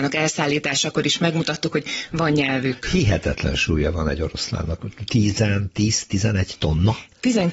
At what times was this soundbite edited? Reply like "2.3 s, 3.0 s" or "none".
none